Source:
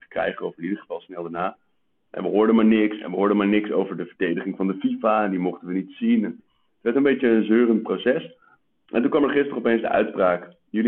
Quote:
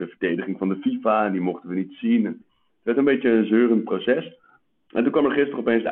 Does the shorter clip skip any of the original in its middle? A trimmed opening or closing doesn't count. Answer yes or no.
no